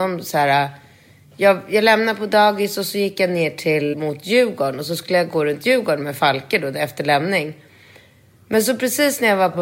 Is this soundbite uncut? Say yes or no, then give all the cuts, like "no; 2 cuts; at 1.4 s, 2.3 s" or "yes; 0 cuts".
no; 1 cut; at 3.9 s